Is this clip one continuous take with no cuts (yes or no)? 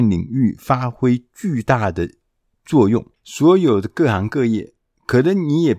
no